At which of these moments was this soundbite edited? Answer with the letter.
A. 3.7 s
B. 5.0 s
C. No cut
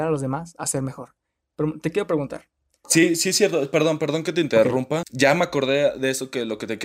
B